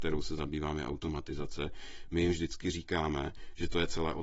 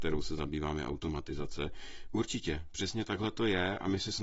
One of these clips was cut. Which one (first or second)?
second